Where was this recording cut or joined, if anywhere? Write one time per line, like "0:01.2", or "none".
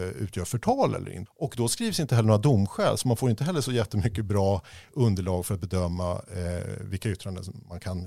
0:01.3